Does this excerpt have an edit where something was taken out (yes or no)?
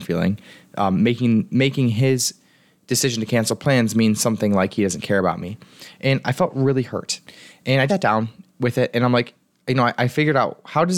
yes